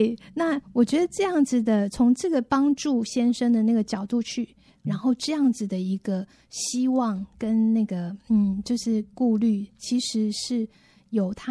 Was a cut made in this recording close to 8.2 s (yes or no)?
no